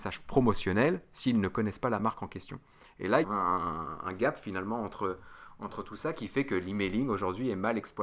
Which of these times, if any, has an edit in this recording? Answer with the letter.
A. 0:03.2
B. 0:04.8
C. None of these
A